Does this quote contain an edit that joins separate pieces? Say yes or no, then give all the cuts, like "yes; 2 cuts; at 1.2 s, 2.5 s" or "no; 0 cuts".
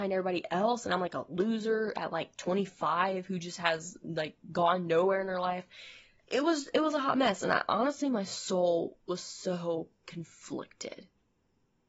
no; 0 cuts